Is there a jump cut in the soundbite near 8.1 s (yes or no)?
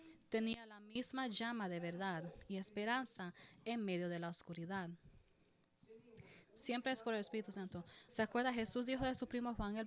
yes